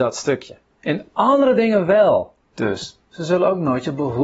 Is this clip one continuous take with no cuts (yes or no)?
no